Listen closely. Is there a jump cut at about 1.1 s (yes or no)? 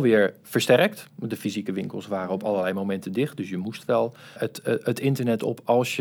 no